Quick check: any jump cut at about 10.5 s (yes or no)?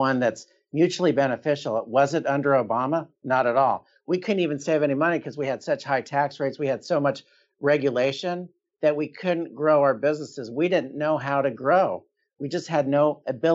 no